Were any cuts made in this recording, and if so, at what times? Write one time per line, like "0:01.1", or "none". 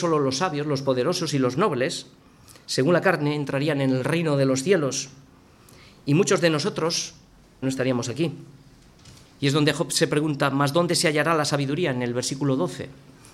0:07.6
0:09.2